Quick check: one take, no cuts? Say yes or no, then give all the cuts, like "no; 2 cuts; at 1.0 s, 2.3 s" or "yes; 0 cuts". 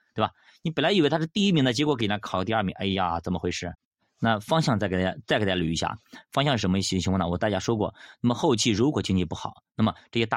yes; 0 cuts